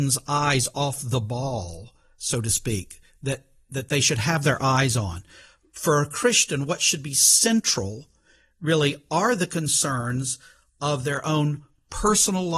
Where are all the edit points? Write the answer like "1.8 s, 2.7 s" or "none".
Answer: none